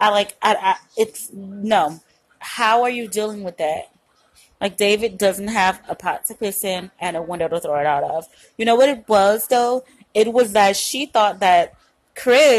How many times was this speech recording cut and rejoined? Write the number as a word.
zero